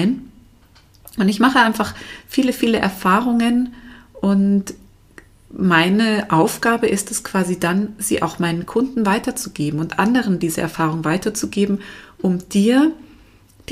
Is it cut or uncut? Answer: uncut